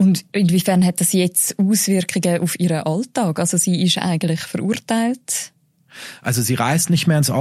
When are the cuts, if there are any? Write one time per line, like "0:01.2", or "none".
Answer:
none